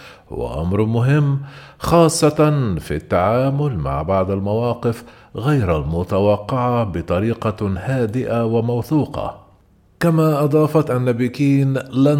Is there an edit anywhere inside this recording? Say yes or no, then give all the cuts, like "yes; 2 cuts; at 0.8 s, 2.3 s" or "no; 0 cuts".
no; 0 cuts